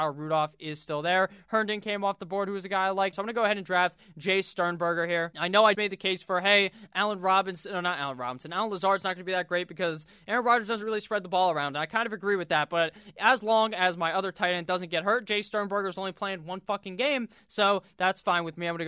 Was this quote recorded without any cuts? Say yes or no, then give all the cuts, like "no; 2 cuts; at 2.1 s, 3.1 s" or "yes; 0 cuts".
no; 2 cuts; at 3.1 s, 5.7 s